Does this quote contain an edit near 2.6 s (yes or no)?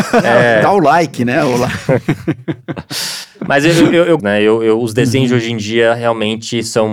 no